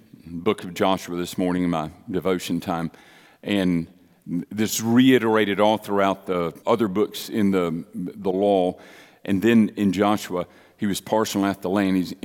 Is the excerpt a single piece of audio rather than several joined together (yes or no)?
no